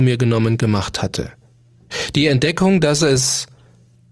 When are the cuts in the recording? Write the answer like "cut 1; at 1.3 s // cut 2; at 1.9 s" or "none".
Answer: none